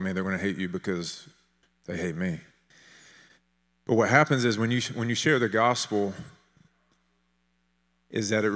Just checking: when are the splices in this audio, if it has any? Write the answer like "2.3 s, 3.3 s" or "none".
none